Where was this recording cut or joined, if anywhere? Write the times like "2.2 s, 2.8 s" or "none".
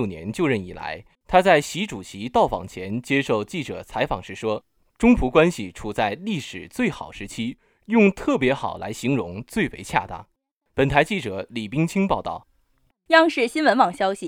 1.1 s